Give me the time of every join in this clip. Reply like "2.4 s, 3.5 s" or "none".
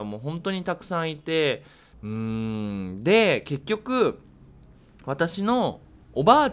1.9 s